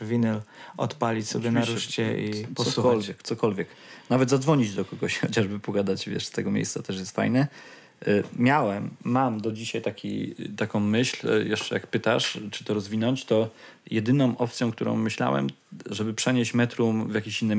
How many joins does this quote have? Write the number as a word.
zero